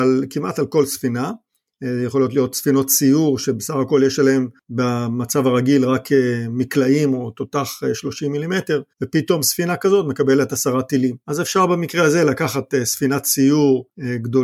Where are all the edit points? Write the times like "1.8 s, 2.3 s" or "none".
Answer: 8.9 s, 11.2 s